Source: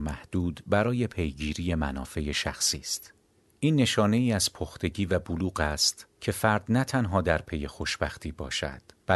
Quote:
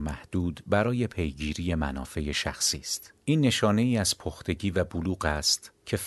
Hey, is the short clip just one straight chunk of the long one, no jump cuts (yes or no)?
no